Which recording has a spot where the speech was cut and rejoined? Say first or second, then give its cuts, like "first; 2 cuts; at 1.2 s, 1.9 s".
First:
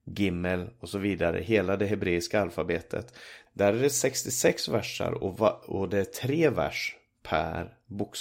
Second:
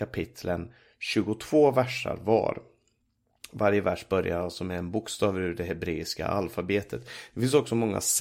first; 1 cut; at 3.5 s